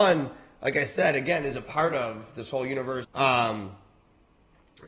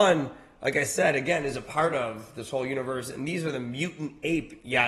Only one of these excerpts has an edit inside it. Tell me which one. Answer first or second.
first